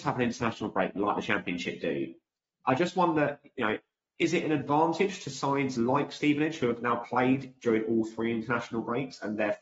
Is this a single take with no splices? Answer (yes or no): yes